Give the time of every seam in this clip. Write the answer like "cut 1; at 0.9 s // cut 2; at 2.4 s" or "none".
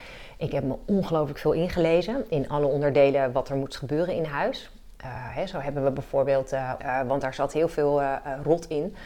cut 1; at 6.8 s